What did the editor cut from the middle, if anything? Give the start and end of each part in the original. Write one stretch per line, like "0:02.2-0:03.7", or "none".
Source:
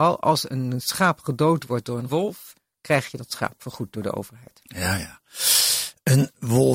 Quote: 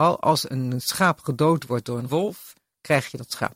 none